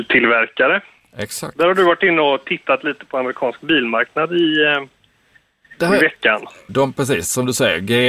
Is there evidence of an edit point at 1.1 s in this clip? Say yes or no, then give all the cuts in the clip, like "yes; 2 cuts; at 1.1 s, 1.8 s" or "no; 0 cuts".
no; 1 cut; at 6.7 s